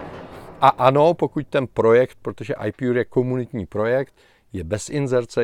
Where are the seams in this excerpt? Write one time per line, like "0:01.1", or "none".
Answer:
none

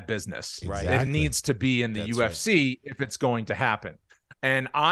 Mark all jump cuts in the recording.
none

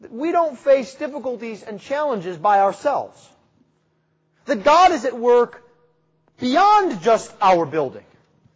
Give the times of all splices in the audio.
none

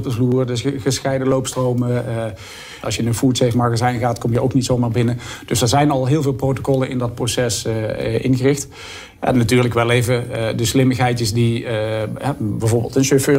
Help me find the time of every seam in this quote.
0:02.8

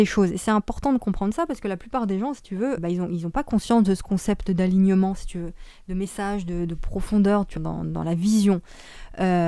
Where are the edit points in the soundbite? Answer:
0:02.8
0:07.6

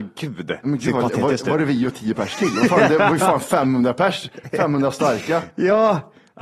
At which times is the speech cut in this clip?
none

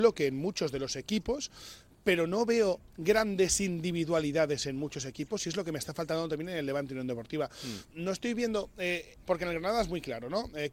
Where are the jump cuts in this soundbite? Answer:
0:07.9
0:09.2

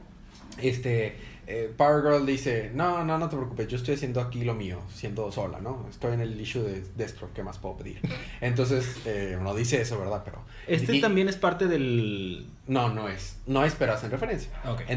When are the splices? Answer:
none

